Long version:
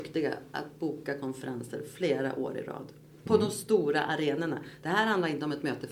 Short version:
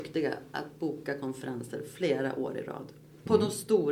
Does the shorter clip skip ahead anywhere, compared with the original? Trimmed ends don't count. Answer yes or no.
no